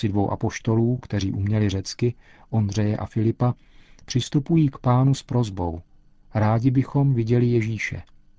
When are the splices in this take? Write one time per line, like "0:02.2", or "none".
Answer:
none